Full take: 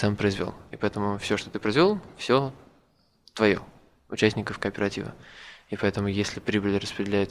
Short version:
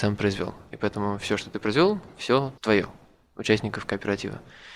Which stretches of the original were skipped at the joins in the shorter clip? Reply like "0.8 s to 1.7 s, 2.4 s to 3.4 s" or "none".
2.6 s to 3.3 s